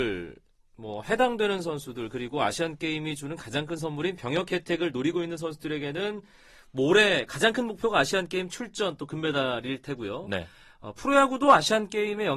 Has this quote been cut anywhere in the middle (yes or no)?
no